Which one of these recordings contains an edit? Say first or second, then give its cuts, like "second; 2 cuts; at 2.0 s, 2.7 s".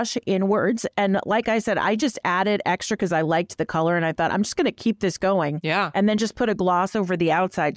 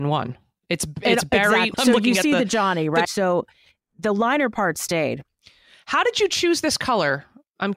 second; 2 cuts; at 1.7 s, 3.0 s